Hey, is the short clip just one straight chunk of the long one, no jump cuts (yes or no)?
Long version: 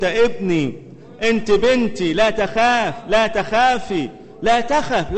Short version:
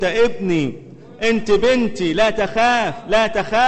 yes